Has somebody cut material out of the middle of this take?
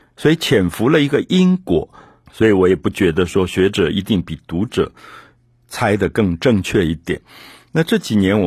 yes; 1 cut; at 2.3 s

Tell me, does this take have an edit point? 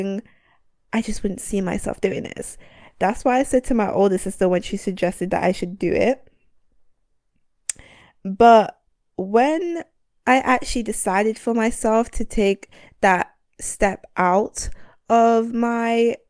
no; 0 cuts

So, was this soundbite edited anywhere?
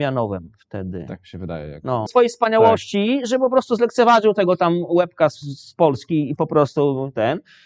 yes; 1 cut; at 2.1 s

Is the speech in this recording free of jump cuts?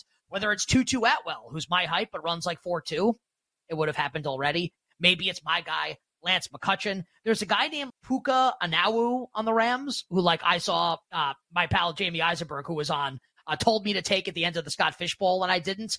no; 2 cuts; at 3.6 s, 7.9 s

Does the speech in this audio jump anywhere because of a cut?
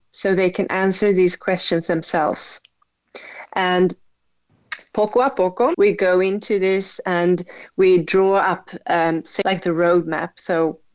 yes; 2 cuts; at 5.7 s, 9.4 s

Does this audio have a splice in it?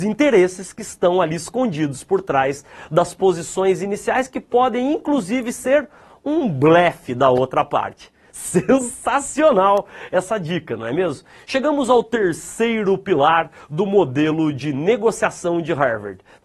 no; 0 cuts

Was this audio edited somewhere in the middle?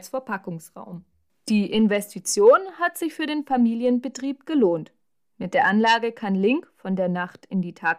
no; 0 cuts

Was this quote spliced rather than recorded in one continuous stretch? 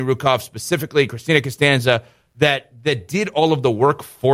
no; 0 cuts

